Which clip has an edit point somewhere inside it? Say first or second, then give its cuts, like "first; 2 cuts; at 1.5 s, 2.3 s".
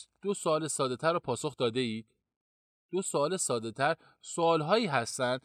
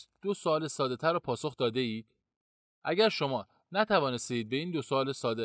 second; 1 cut; at 2.7 s